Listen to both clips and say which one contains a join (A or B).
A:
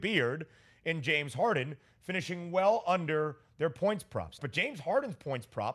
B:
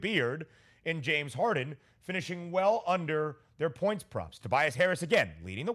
A